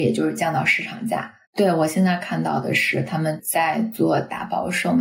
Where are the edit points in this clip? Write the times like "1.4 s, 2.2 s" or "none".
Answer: 1.4 s